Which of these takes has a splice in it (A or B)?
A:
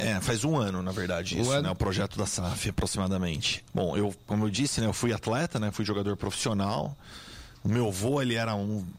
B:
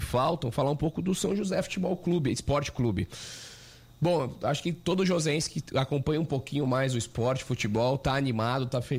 A